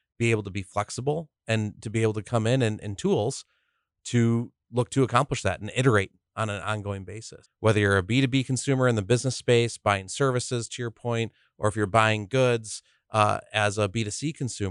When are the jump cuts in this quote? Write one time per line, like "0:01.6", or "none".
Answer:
0:02.8
0:07.4